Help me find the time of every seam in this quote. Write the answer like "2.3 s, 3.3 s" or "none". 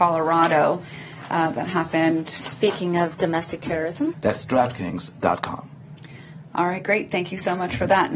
4.1 s